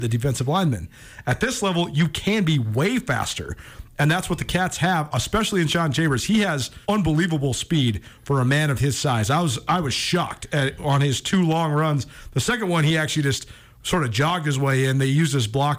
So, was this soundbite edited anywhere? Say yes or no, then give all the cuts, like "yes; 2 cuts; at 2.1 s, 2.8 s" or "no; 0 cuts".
yes; 1 cut; at 6.8 s